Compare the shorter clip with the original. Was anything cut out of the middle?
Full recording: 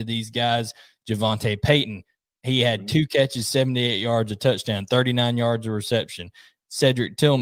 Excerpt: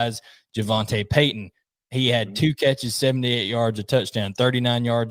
no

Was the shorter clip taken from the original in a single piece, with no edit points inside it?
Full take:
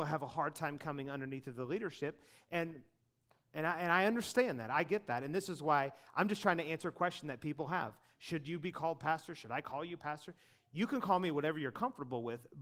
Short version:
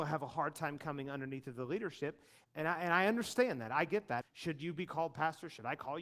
no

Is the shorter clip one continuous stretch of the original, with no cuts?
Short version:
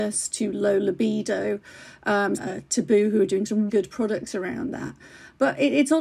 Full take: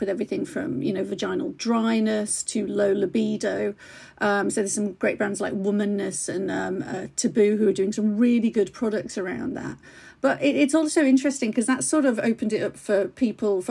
no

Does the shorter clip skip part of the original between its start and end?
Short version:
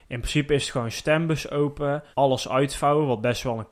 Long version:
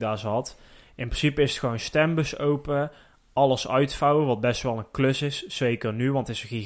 yes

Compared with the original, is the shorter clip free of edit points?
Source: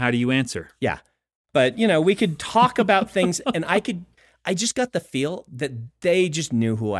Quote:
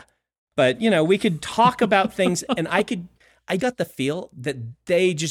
no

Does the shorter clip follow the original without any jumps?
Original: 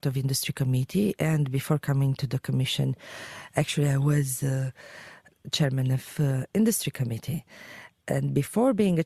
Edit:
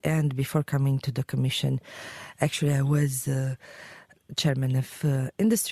yes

